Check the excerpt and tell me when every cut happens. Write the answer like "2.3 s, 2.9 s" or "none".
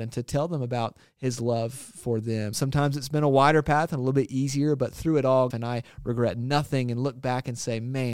2.5 s, 5.5 s